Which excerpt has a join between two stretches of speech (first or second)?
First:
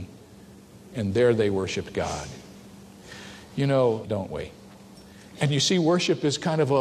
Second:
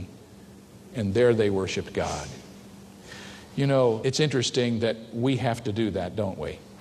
first